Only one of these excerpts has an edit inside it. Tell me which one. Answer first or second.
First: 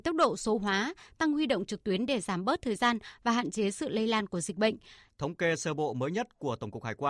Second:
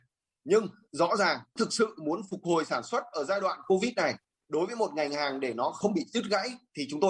first